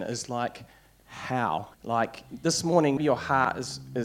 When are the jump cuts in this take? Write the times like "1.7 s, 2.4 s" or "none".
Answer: 1.7 s, 3.0 s